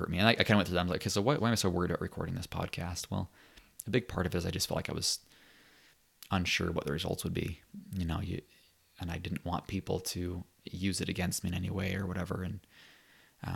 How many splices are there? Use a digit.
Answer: 1